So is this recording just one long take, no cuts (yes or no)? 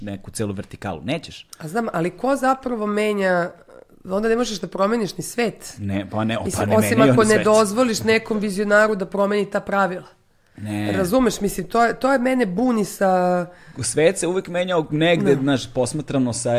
yes